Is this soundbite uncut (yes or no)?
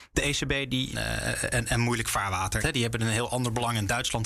no